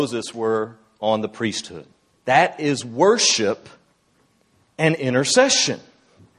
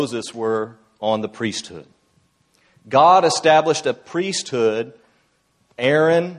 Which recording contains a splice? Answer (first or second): first